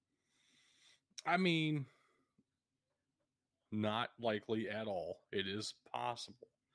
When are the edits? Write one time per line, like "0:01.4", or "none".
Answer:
0:03.6